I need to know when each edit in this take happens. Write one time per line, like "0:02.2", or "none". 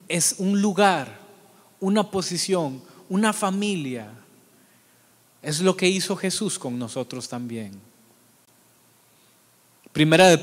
none